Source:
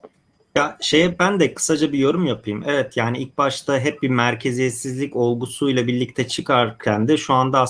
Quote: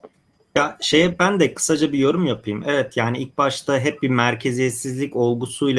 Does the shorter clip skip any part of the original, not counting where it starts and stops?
no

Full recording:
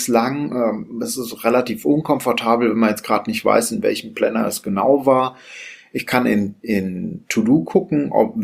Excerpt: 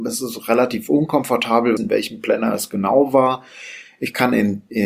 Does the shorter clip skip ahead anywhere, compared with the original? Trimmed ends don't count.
yes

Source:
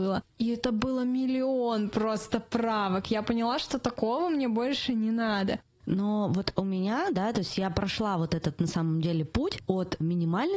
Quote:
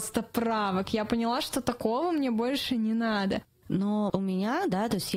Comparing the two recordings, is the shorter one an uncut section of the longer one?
no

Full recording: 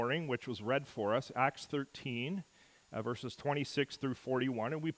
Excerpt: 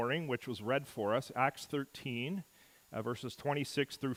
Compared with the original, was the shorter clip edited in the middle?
no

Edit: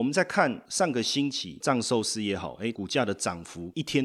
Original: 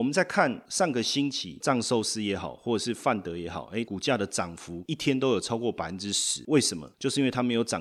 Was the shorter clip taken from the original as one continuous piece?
no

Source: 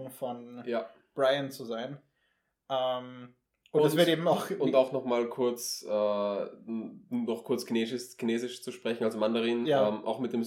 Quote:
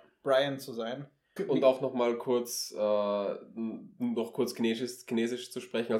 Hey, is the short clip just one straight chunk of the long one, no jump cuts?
no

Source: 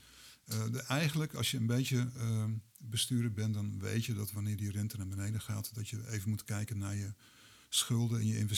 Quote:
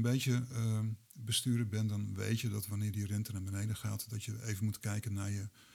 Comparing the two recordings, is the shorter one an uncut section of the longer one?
yes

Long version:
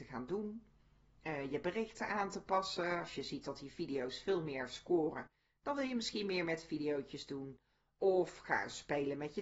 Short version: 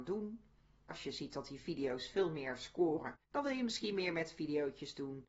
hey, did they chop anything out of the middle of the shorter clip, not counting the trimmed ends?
yes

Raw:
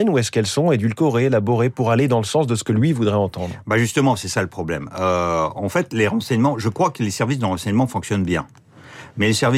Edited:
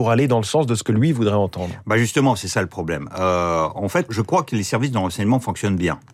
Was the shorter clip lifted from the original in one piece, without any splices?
no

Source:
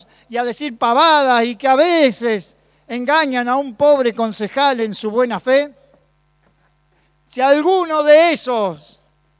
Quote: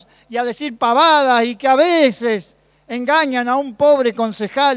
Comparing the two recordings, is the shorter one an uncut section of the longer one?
yes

